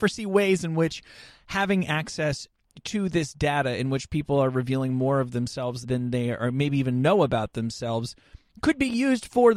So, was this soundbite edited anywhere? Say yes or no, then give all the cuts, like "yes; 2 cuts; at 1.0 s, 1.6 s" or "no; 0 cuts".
yes; 1 cut; at 5.8 s